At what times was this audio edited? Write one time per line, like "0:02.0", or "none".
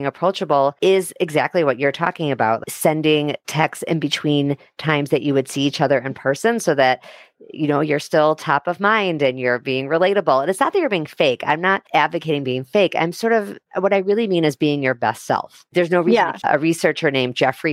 0:16.4